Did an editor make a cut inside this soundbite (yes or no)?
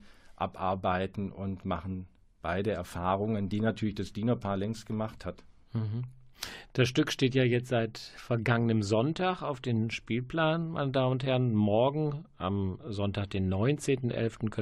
no